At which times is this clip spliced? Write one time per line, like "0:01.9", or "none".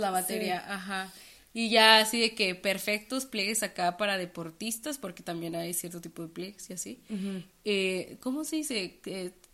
none